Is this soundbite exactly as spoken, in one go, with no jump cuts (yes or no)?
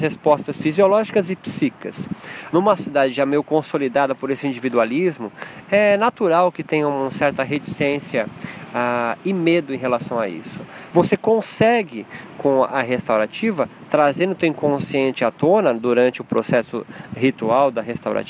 no